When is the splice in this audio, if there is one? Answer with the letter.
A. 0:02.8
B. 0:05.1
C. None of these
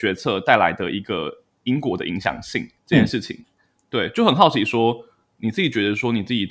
A